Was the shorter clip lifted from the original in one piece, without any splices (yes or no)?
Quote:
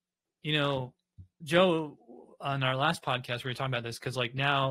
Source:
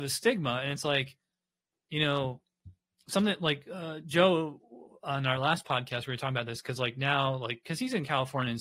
no